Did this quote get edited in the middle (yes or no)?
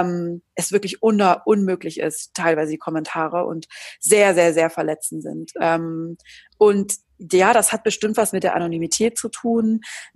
no